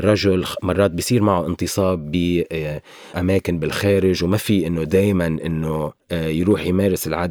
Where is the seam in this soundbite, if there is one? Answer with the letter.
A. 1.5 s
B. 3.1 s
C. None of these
B